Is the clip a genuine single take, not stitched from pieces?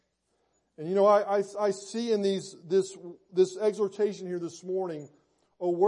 yes; 0 cuts

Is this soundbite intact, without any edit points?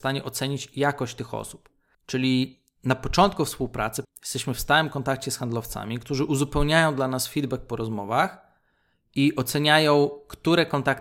no; 2 cuts; at 1.9 s, 4.0 s

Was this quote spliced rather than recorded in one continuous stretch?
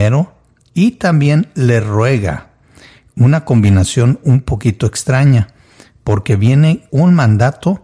yes; 1 cut; at 6.9 s

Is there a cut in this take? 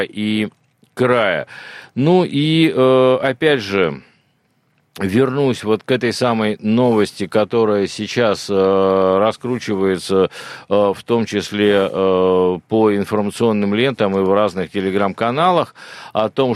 no; 0 cuts

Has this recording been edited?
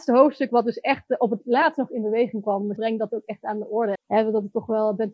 yes; 2 cuts; at 2.8 s, 4.0 s

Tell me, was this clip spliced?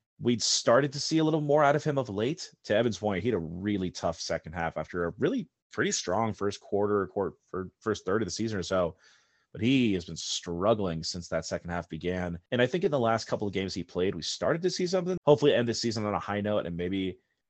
yes; 2 cuts; at 12.5 s, 15.2 s

